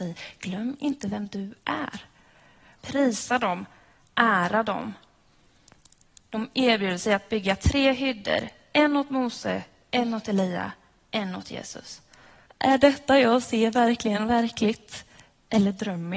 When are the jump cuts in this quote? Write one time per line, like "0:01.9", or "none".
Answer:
0:02.8
0:12.5